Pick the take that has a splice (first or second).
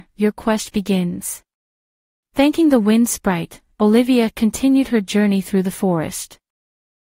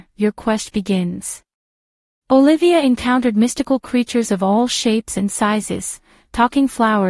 second